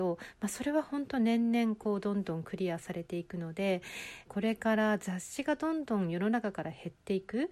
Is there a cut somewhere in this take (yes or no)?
yes